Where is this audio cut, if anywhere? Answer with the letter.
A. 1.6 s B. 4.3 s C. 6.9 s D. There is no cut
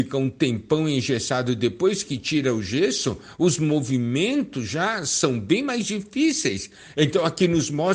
C